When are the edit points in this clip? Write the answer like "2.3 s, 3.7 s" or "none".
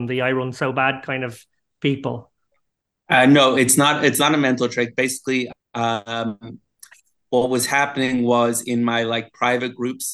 none